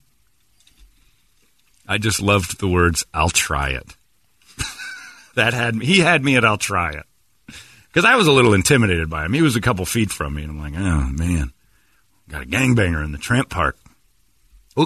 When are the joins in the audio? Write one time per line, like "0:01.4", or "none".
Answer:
none